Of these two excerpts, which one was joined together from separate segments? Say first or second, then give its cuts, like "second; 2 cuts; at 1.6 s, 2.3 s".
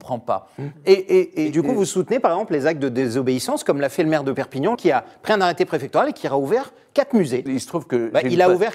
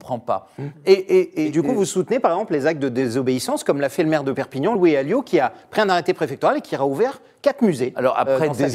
first; 2 cuts; at 4.7 s, 7.5 s